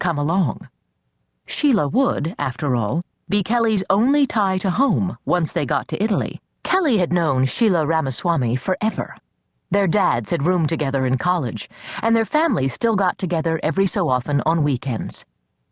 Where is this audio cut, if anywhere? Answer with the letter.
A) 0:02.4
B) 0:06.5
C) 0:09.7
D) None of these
B